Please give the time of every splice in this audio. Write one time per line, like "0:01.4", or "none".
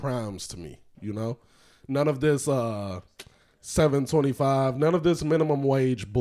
0:00.9